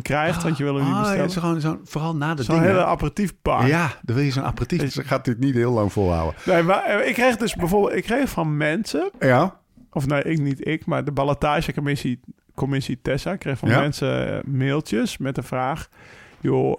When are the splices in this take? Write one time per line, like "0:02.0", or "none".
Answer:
0:04.9

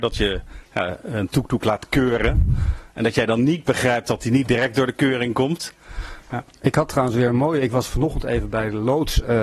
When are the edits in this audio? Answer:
0:06.2

